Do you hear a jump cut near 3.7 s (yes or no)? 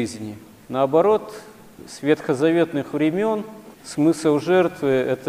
yes